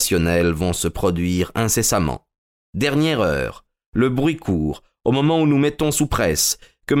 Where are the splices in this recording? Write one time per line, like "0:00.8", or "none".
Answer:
none